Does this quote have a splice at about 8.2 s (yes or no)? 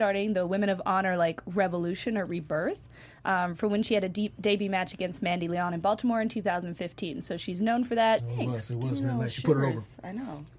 yes